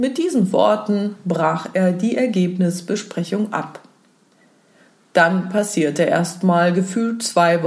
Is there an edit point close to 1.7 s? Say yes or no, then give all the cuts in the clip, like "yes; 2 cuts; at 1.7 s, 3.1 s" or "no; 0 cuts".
no; 0 cuts